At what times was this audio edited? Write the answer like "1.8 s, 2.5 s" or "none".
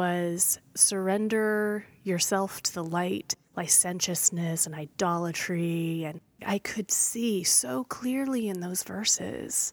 3.4 s, 6.4 s